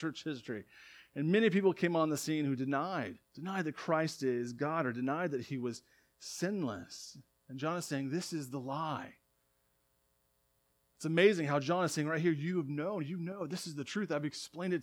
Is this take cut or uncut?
cut